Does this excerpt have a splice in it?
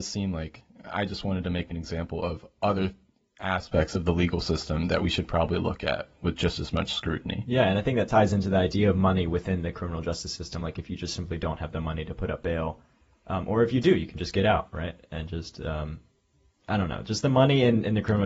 no; 0 cuts

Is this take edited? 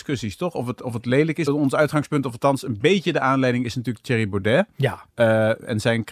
yes; 1 cut; at 1.5 s

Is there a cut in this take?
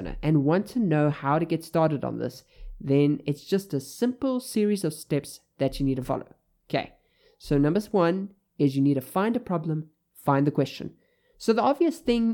no; 0 cuts

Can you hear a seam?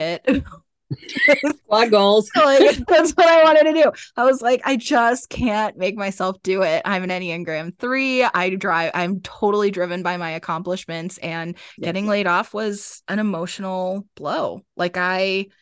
no; 0 cuts

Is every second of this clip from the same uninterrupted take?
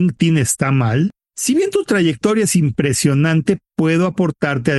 no; 1 cut; at 1.3 s

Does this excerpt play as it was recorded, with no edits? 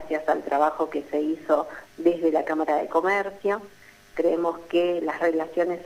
no; 1 cut; at 4.1 s

